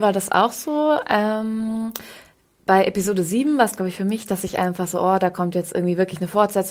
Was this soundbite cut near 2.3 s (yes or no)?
no